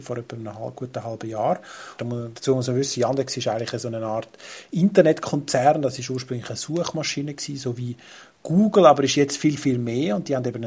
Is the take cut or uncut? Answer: cut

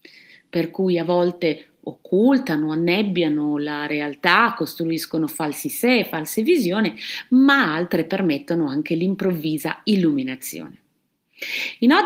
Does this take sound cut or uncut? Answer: uncut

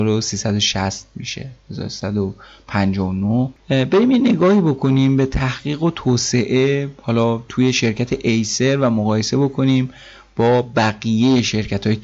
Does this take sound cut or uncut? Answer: cut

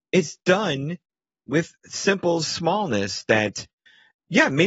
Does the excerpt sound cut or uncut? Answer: uncut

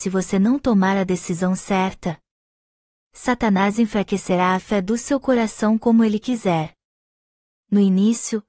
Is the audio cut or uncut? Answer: uncut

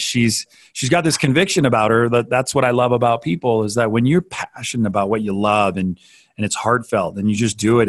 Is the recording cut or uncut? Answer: uncut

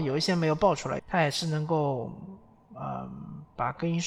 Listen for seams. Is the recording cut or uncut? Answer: cut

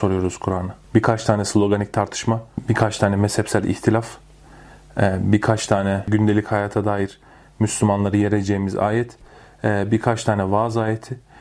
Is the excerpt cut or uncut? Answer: uncut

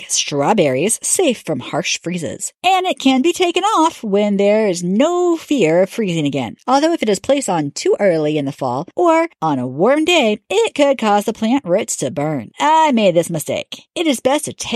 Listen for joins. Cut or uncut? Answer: cut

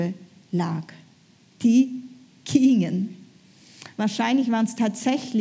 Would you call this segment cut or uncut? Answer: cut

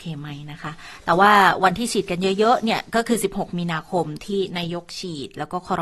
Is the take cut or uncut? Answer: uncut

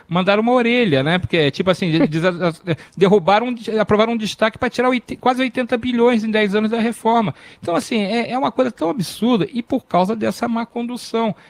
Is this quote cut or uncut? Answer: uncut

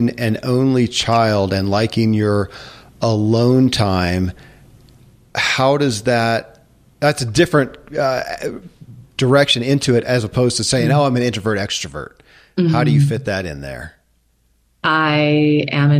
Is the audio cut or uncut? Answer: uncut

